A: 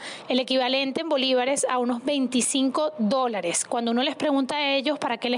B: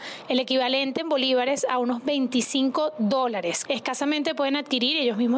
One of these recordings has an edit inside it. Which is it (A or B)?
B